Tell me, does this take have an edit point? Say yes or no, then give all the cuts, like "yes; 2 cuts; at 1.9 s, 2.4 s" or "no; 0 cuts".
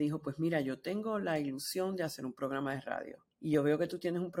yes; 1 cut; at 3.3 s